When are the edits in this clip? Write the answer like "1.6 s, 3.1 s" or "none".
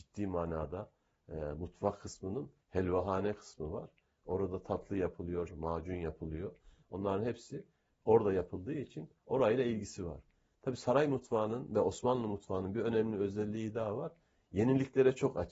5.5 s